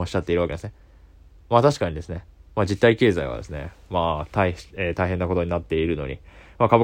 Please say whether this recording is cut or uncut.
uncut